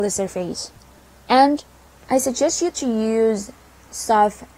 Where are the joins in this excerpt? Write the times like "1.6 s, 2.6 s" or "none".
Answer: none